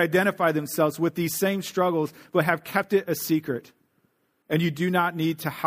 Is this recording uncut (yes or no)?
no